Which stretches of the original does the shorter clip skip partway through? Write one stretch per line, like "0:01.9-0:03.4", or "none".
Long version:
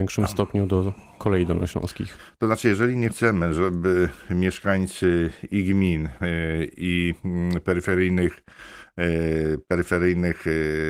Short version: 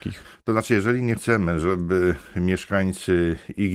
none